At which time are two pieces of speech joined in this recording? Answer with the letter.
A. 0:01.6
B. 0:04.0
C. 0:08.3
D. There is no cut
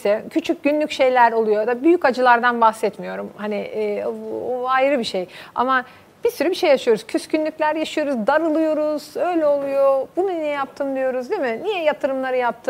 D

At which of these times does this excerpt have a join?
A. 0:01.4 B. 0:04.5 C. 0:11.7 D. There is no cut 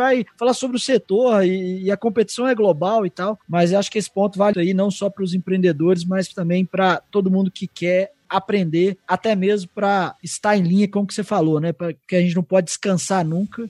B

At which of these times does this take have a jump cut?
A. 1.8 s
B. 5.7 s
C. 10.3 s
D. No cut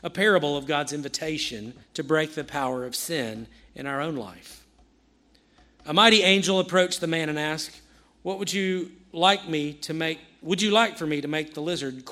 A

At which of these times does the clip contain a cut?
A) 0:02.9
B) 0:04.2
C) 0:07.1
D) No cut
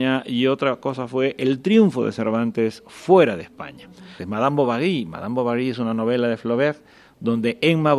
B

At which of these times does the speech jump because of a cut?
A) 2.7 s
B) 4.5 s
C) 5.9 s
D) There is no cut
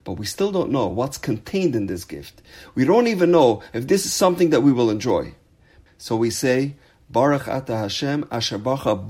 C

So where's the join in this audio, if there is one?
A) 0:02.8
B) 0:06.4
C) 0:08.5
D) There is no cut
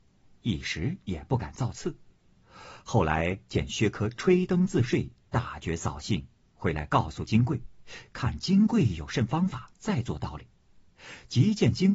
D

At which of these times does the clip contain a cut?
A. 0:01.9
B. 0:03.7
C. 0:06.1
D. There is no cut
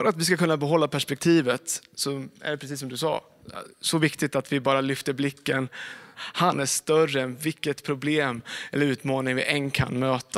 C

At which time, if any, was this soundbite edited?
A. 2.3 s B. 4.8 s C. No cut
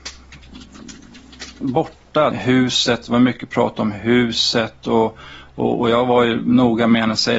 A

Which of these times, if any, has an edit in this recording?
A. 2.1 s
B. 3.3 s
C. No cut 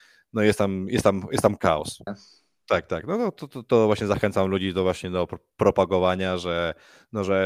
A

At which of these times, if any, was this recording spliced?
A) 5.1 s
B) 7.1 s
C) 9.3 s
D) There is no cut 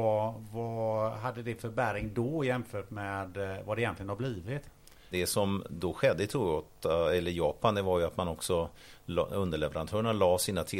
A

